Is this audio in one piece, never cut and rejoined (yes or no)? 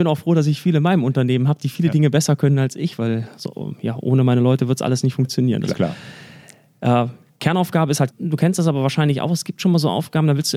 no